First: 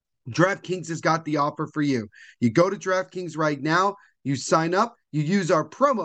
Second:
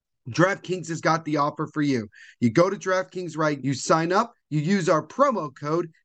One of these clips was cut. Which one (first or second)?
second